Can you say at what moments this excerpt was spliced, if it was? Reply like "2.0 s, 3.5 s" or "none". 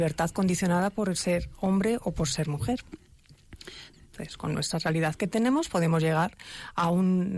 3.9 s